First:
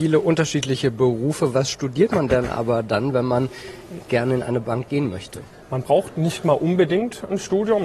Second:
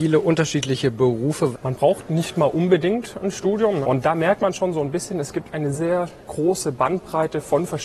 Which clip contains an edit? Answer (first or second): second